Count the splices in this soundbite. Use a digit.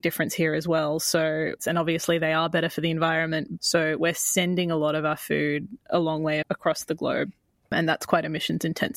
3